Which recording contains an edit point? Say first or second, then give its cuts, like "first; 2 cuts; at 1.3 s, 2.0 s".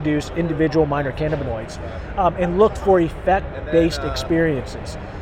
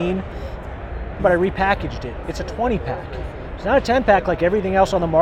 second; 1 cut; at 1.2 s